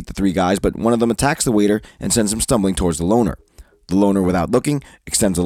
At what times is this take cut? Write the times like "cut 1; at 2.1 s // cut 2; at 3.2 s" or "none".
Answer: none

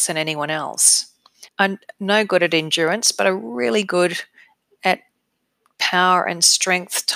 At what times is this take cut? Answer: cut 1; at 1.5 s

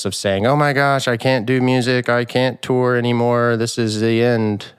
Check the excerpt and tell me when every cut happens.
none

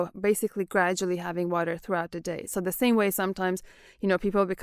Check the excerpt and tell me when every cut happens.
cut 1; at 2.5 s

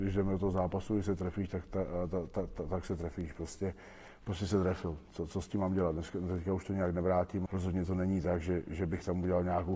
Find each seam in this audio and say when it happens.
cut 1; at 7.5 s

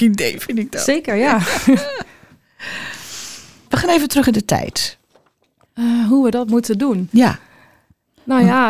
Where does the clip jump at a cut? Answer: cut 1; at 3.7 s // cut 2; at 5.7 s

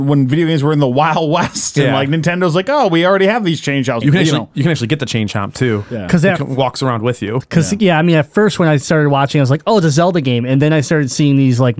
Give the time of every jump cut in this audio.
cut 1; at 4.0 s // cut 2; at 7.4 s

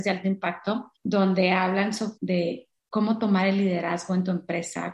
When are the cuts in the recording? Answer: cut 1; at 0.9 s // cut 2; at 2.2 s

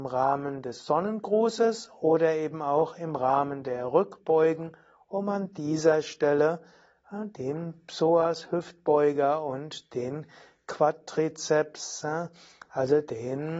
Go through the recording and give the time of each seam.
none

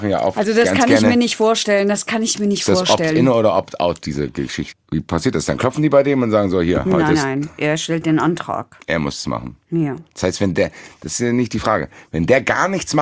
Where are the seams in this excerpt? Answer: cut 1; at 4.7 s

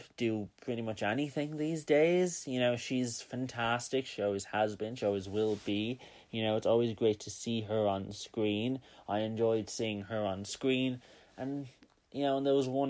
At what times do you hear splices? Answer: none

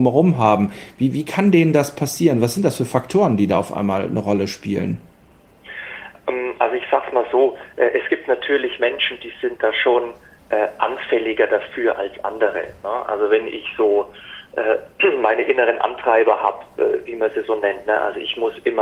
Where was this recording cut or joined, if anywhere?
none

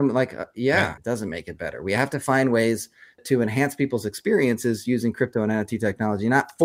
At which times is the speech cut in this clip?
cut 1; at 1.0 s // cut 2; at 3.2 s

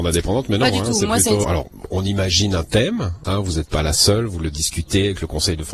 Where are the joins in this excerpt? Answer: cut 1; at 1.4 s // cut 2; at 3.2 s

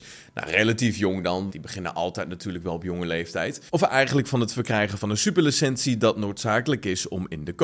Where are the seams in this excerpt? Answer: cut 1; at 1.5 s // cut 2; at 3.7 s

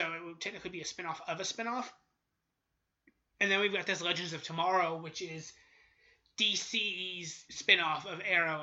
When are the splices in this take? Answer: cut 1; at 7.5 s

